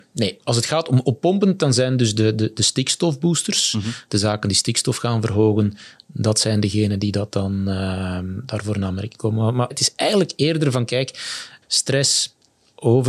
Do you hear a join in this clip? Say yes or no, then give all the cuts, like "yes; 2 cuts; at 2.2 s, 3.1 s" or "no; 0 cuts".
yes; 2 cuts; at 9.7 s, 11.6 s